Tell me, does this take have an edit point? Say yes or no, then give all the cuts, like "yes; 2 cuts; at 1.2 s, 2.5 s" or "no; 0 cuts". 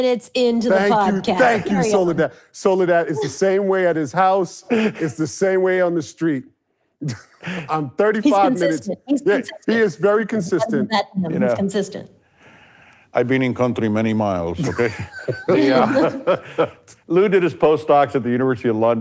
no; 0 cuts